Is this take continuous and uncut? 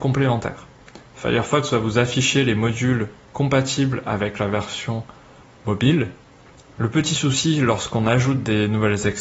no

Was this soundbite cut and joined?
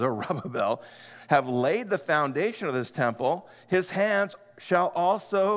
no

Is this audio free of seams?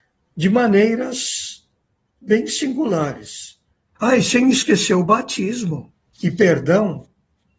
no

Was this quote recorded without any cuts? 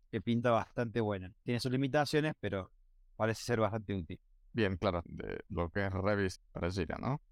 no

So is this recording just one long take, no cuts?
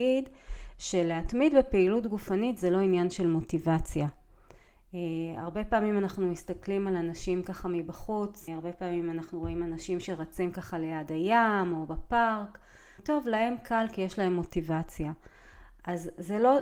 no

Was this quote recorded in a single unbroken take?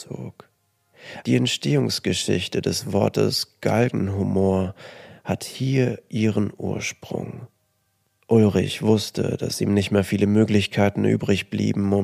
no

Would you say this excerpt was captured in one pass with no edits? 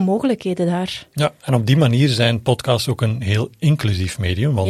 yes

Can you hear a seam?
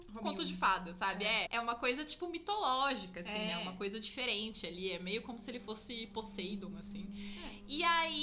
yes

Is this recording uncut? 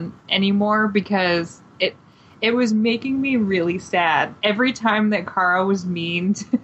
yes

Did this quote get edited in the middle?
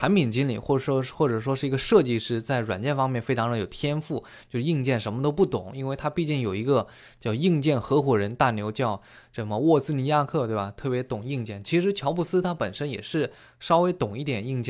no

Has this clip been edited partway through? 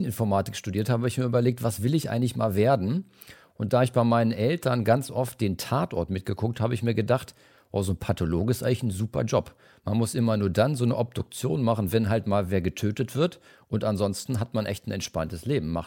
no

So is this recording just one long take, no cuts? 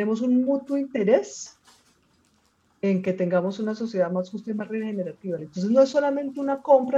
no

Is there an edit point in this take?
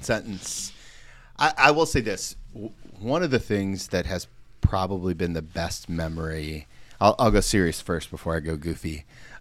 no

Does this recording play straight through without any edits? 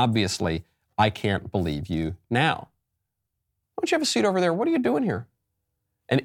no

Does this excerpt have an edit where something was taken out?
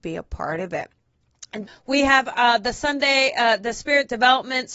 yes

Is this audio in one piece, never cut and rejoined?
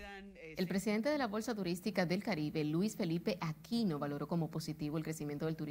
yes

